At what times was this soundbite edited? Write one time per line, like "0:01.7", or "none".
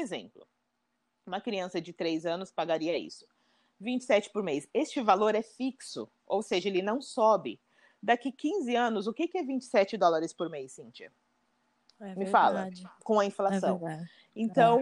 none

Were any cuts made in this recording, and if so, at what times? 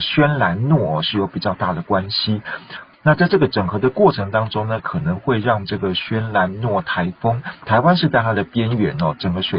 0:02.9
0:07.6

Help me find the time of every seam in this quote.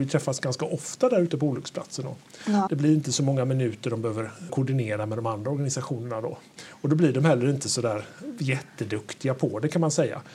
0:02.7
0:04.5

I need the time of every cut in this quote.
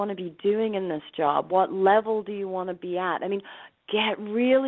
0:01.5

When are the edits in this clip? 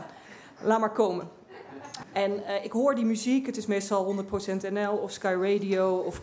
0:02.0

